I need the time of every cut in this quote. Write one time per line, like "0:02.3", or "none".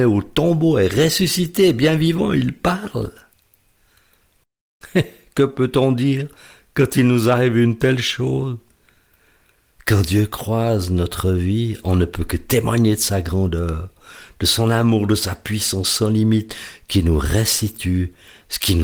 none

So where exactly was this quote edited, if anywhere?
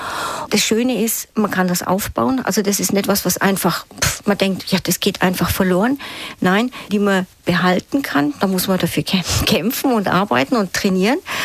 0:06.9

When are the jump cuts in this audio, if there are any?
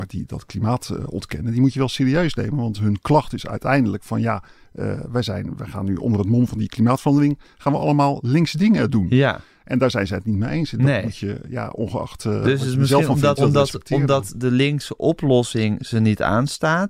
0:13.4

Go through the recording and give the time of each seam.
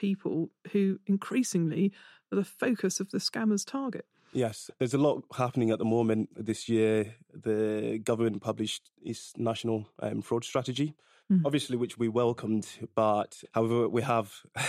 none

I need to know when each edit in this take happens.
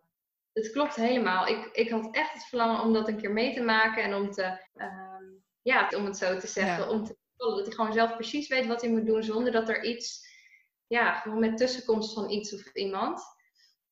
0:04.7
0:05.9

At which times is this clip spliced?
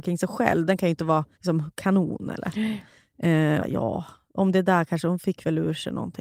0:01.3
0:03.6

